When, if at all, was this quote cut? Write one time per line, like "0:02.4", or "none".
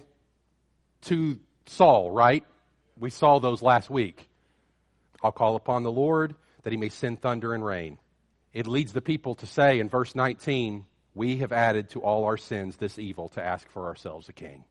0:05.1
0:08.3